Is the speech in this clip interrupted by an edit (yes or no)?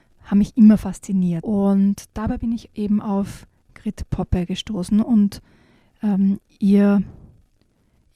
yes